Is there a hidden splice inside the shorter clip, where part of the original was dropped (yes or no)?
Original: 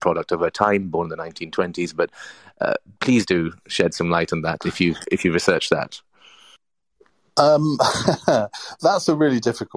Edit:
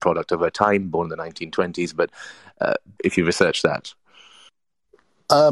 yes